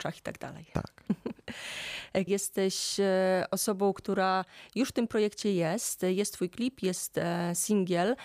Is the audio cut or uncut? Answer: cut